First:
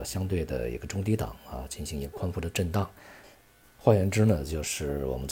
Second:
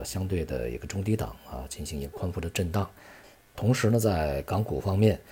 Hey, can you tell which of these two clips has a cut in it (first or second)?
second